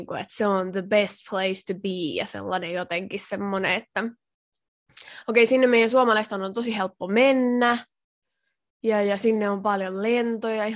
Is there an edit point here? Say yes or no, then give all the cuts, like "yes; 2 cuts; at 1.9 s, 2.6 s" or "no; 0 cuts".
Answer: no; 0 cuts